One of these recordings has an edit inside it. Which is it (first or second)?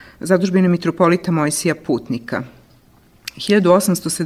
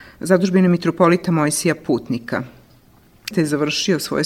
second